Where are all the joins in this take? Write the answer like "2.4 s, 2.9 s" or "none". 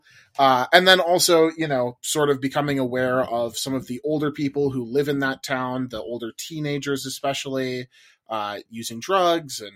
none